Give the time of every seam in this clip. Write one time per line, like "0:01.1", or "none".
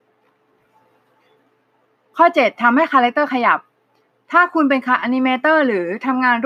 none